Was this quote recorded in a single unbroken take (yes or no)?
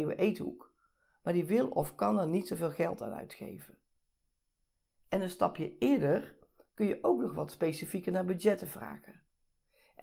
yes